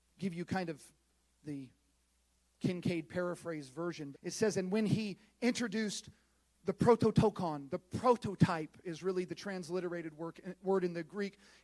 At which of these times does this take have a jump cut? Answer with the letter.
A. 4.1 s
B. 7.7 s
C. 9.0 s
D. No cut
A